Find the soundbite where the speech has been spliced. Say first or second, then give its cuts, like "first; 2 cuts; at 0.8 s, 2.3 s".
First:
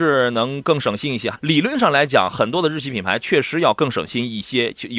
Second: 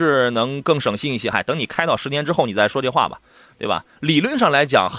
first; 1 cut; at 1.3 s